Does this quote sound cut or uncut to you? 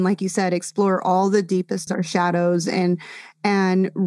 cut